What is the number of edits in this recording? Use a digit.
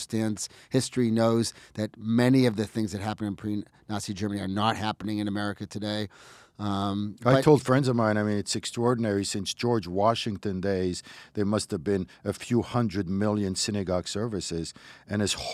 0